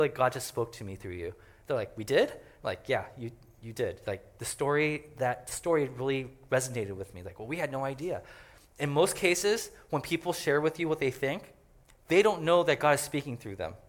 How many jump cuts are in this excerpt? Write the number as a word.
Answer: zero